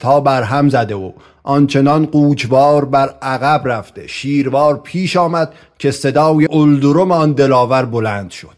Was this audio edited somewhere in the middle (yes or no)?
yes